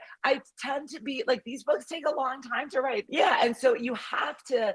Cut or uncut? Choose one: cut